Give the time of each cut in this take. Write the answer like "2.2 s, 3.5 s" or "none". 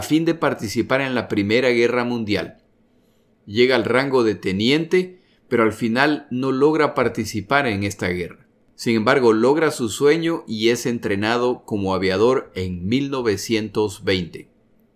none